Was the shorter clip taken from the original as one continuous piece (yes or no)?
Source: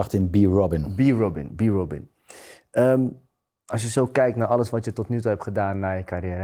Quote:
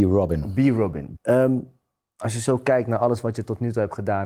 no